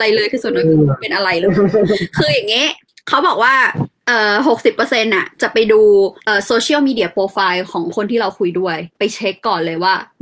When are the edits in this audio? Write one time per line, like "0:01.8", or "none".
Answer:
none